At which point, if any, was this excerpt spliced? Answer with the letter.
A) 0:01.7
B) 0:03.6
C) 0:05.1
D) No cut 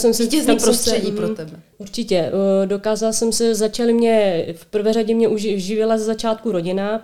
A